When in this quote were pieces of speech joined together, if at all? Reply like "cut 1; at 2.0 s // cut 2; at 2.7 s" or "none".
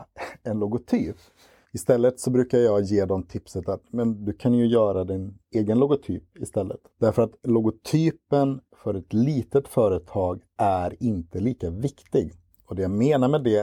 cut 1; at 1.6 s // cut 2; at 6.9 s